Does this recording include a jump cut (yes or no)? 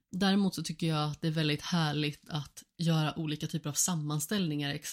no